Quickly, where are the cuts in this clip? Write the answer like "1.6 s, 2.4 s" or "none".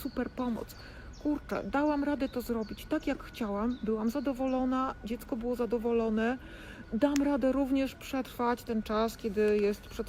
none